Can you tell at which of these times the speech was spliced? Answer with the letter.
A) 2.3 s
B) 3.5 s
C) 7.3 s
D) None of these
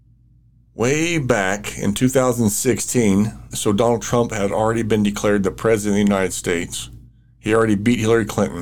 B